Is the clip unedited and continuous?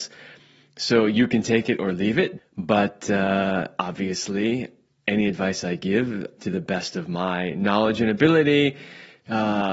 no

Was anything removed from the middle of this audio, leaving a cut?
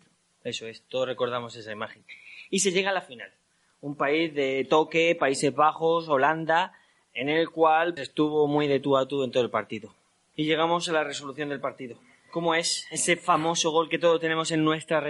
yes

